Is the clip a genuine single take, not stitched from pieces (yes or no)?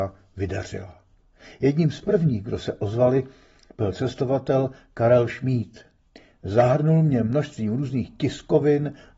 yes